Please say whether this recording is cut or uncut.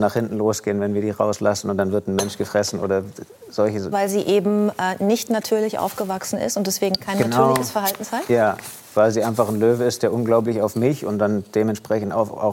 cut